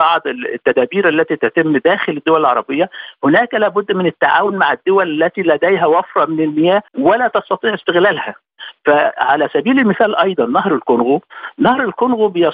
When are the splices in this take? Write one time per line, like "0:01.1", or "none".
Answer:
0:06.9